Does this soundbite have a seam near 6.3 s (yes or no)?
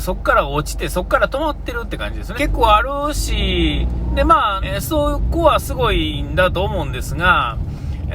no